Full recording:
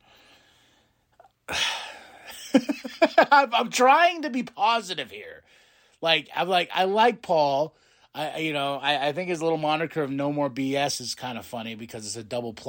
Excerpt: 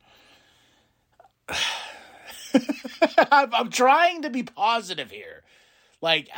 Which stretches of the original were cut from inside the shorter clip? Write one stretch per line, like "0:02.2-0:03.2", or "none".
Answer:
none